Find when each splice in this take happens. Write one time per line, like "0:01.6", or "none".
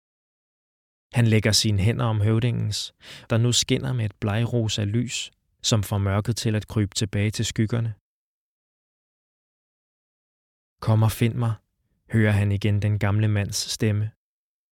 0:03.3